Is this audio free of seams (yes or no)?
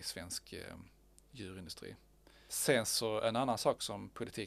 yes